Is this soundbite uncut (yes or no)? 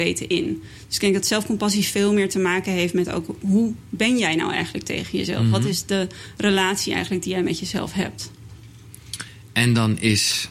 yes